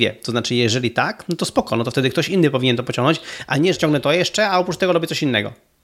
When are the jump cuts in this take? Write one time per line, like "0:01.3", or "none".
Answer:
0:03.7